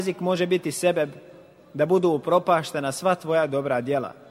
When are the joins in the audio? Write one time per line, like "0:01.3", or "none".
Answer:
none